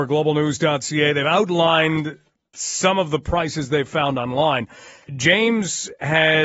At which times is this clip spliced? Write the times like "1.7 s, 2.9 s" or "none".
5.1 s